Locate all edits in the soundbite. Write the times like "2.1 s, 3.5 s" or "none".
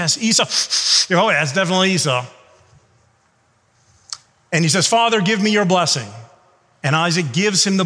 none